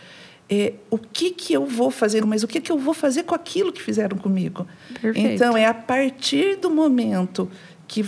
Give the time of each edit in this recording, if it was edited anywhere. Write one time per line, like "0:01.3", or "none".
0:02.2